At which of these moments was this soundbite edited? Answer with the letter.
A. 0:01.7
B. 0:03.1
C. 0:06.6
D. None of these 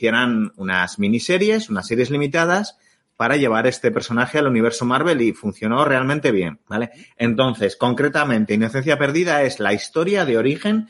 C